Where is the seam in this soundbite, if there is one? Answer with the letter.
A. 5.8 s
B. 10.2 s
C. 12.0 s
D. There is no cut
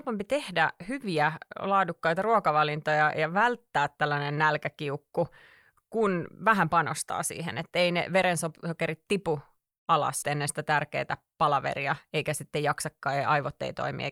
B